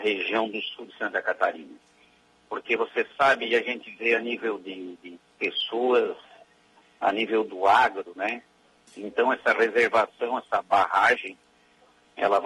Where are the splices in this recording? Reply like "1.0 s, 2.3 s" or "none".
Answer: 8.8 s